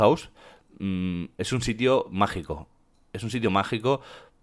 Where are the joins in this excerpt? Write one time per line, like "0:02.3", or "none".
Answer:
none